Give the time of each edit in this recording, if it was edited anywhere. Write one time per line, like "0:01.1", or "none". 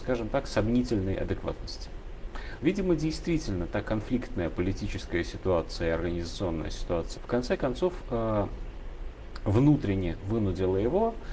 0:02.6
0:07.2